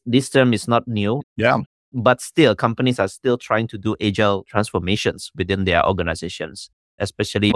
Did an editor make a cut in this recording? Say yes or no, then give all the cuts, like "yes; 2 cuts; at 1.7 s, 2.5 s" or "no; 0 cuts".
yes; 1 cut; at 1.2 s